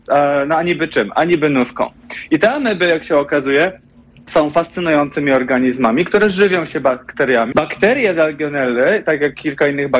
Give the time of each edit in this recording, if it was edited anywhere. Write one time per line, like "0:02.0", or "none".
0:07.5